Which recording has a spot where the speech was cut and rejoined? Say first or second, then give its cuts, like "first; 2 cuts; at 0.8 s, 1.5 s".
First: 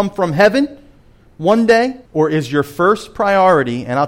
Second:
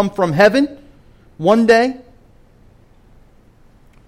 first; 1 cut; at 2.1 s